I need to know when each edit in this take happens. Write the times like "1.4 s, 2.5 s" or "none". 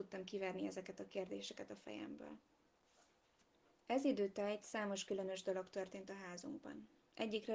none